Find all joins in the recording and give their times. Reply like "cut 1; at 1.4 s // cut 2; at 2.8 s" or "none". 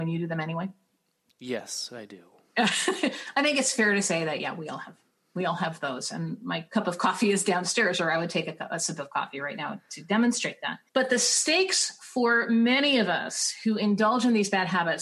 cut 1; at 10.9 s